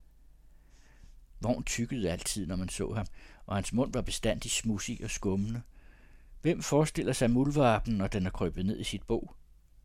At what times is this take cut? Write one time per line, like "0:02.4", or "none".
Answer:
0:01.3
0:06.4